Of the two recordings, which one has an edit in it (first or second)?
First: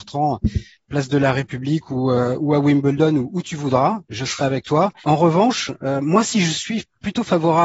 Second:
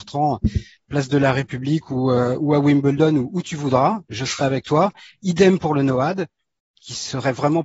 first